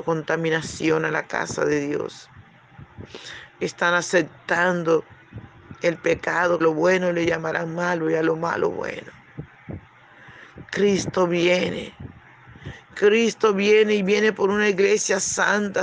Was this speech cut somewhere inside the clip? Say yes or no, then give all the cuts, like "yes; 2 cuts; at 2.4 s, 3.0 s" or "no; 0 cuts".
yes; 1 cut; at 6.6 s